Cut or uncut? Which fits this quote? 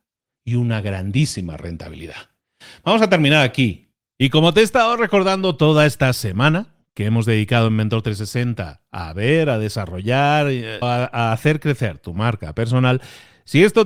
cut